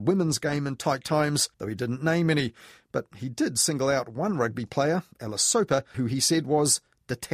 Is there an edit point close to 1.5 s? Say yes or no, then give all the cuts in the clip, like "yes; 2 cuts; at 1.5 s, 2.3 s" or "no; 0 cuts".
yes; 2 cuts; at 1.5 s, 5.9 s